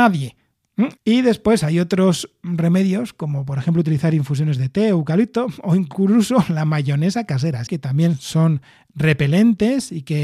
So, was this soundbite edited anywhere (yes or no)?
yes